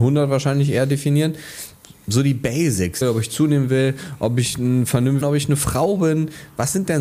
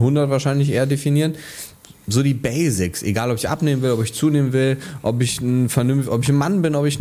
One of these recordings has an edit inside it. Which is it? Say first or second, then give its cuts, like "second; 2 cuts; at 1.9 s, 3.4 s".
first; 2 cuts; at 3.0 s, 5.2 s